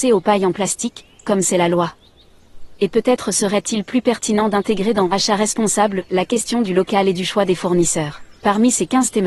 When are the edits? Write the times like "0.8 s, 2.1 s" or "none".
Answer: 8.4 s